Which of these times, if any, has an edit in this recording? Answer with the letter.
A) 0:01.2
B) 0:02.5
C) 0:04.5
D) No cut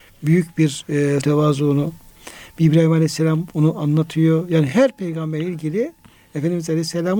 A